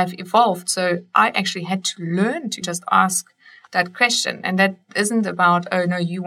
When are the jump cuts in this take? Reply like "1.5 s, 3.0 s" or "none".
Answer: 2.6 s